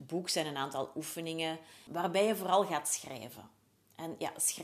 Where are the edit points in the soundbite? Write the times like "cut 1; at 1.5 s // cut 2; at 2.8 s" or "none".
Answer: cut 1; at 1.9 s